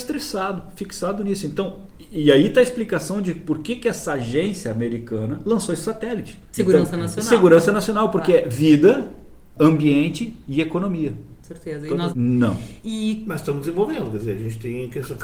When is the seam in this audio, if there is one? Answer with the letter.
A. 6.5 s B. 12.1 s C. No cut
B